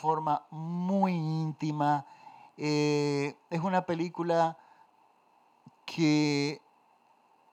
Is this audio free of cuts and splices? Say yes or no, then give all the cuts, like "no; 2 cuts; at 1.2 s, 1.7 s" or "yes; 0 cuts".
yes; 0 cuts